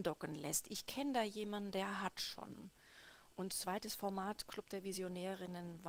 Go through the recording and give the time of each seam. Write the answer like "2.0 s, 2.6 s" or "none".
3.3 s